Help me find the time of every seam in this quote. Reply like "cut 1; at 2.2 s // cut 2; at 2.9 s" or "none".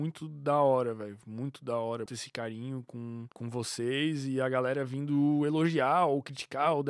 cut 1; at 2.1 s // cut 2; at 3.3 s